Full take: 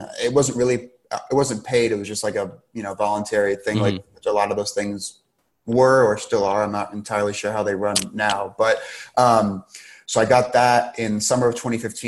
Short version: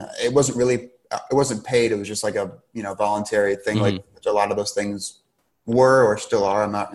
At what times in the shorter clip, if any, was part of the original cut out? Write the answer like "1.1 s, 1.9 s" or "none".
none